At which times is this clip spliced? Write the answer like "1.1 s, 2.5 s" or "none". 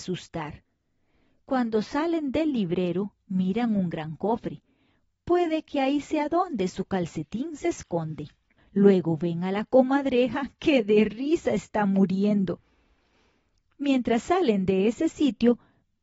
8.6 s